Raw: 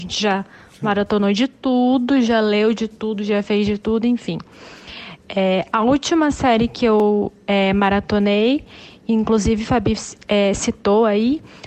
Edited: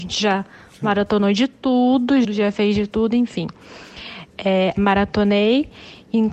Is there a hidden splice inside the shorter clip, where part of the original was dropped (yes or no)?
yes